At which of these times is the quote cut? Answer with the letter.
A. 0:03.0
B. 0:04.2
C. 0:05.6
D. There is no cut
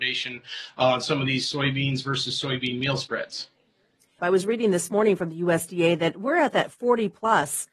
B